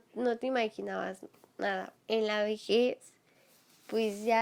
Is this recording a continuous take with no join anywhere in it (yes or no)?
no